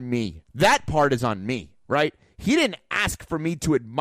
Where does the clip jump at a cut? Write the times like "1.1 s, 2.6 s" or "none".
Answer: none